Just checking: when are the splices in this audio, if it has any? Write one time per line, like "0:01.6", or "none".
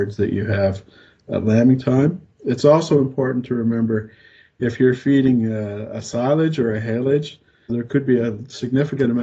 0:07.7

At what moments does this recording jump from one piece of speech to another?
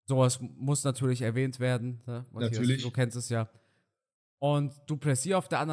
none

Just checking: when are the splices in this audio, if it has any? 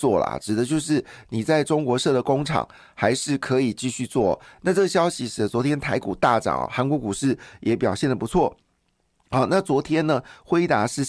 none

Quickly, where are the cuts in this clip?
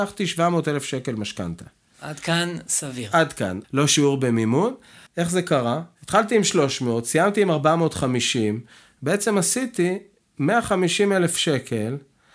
0:03.6
0:05.1

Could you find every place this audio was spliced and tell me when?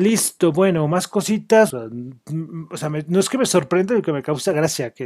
0:01.7

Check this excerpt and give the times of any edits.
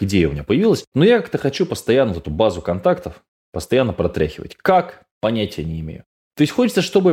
0:00.9

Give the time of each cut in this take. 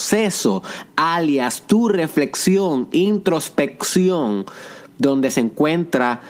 none

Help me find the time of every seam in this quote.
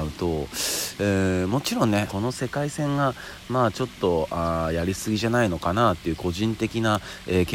0:02.1

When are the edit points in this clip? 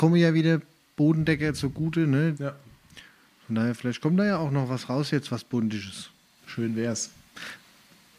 0:02.3
0:06.4

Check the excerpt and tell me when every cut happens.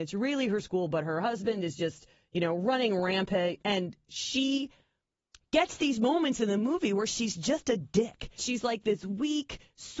0:03.6
0:08.4

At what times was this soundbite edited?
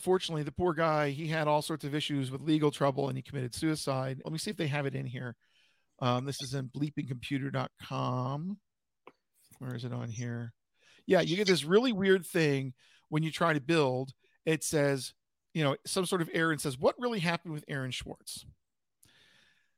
0:04.2

